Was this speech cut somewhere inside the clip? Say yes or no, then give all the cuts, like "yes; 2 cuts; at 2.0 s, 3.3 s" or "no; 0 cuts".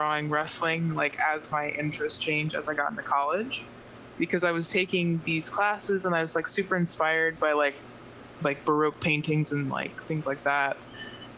yes; 1 cut; at 4.2 s